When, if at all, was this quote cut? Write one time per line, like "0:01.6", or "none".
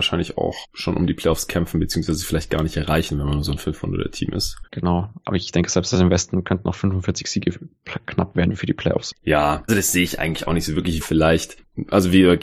0:04.7
0:09.7
0:11.0

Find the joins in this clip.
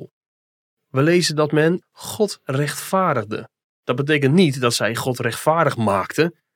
0:01.8
0:03.7

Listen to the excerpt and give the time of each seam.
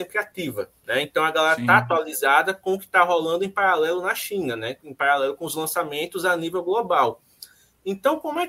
none

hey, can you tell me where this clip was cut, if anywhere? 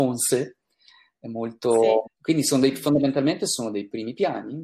0:02.0

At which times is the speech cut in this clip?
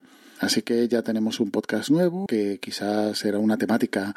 0:02.3

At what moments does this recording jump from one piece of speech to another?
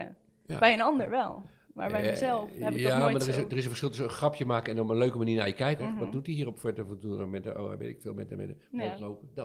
0:05.8

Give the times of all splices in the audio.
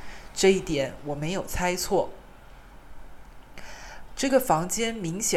0:04.1

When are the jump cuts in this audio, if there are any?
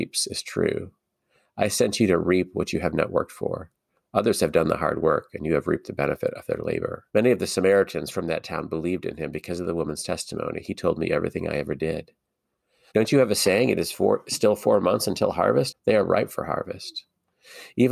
0:07.1
0:12.9
0:15.7

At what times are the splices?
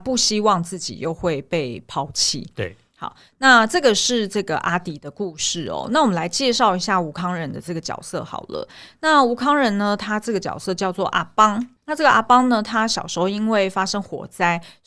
0:11.8

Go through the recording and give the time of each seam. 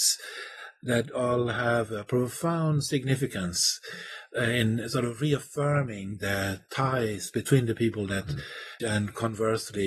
0:08.8

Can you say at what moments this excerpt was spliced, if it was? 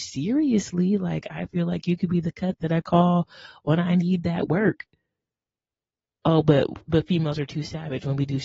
0:06.8

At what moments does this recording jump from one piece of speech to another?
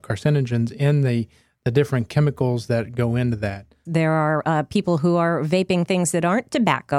0:03.9

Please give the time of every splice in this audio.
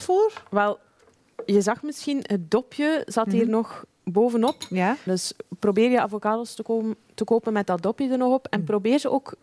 0:05.1

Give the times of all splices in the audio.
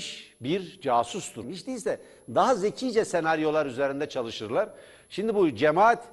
0:01.4

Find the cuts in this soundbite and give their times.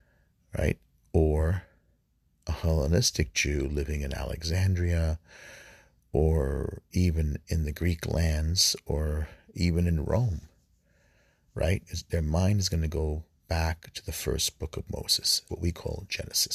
0:11.9
0:15.5

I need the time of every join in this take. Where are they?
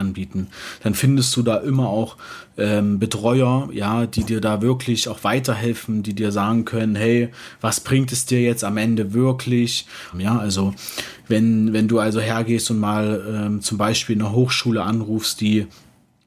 0:10.1

